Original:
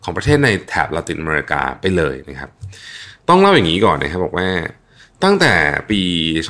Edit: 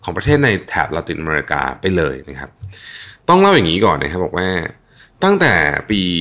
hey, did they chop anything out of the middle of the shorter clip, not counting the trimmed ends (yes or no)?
no